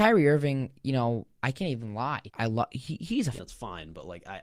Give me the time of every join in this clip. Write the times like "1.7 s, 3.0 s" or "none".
2.3 s, 3.4 s